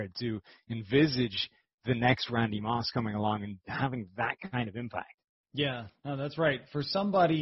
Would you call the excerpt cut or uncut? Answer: uncut